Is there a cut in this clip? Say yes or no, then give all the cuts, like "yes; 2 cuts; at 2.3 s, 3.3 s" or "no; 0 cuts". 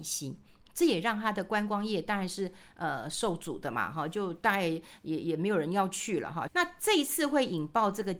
yes; 1 cut; at 6.5 s